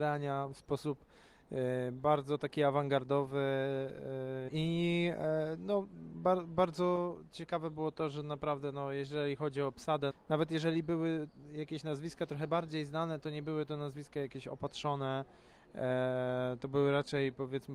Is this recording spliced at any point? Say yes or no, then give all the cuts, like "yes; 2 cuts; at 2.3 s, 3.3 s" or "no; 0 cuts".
yes; 2 cuts; at 4.5 s, 10.1 s